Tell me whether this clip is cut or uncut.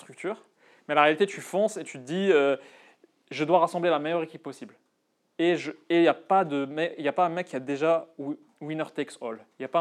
uncut